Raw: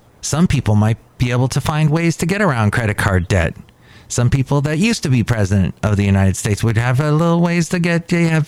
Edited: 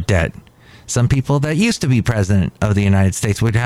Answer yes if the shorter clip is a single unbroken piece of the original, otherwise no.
yes